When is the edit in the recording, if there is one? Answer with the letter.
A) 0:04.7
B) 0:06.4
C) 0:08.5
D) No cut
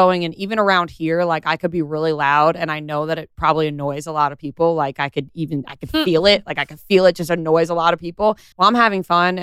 C